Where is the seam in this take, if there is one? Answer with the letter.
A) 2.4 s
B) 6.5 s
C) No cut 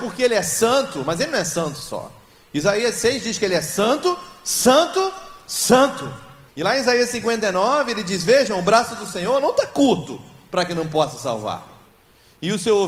B